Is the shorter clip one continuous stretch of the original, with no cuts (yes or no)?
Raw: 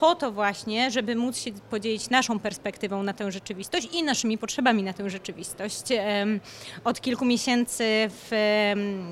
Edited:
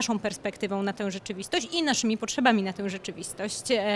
yes